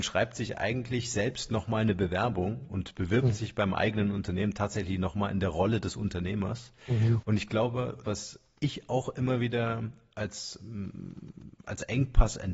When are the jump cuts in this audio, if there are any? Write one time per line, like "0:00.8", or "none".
0:08.0